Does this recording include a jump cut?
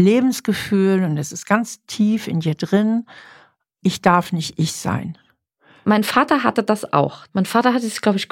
yes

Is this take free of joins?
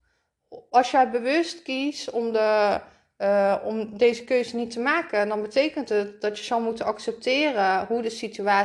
yes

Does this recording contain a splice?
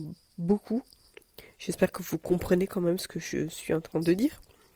no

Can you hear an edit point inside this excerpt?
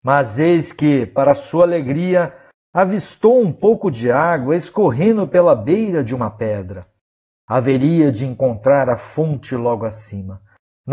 no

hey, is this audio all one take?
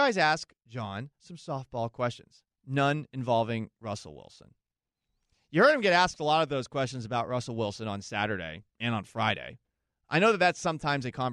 no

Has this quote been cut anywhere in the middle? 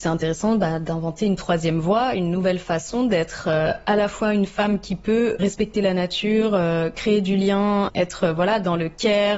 yes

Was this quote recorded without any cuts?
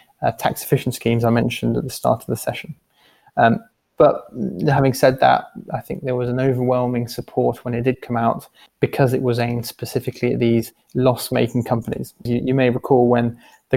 yes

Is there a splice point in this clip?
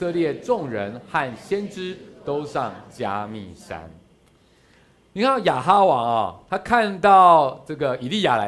no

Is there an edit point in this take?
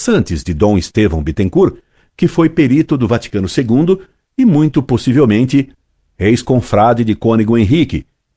no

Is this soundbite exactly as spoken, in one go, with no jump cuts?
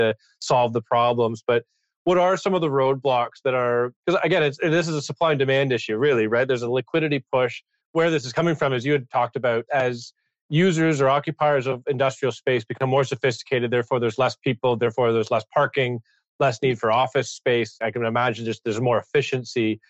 no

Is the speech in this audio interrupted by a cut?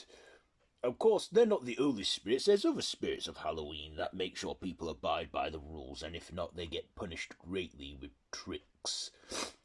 no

